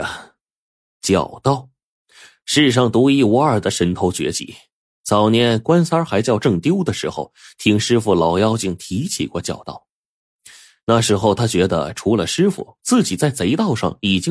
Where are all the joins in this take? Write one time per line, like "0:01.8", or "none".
none